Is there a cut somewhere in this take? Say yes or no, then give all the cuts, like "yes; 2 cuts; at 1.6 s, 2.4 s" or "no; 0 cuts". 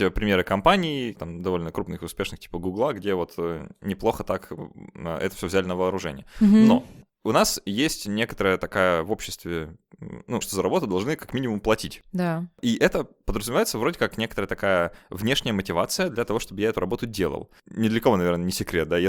yes; 2 cuts; at 1.1 s, 10.4 s